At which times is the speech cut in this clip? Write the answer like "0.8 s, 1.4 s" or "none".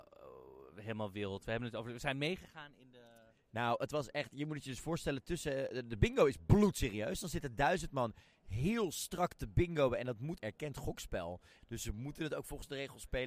10.4 s, 11.6 s